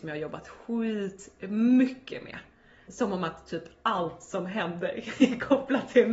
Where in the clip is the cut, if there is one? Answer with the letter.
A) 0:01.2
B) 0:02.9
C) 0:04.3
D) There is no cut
B